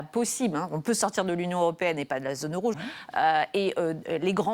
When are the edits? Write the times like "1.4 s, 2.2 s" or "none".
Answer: 2.7 s